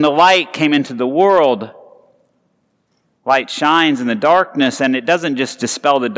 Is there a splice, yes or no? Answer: yes